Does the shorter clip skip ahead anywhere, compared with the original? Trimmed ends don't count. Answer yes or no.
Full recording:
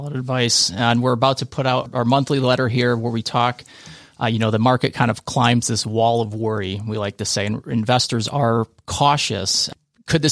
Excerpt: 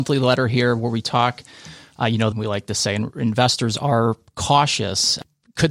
yes